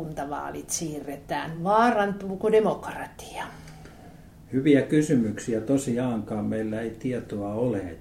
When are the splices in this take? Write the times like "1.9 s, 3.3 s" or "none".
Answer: none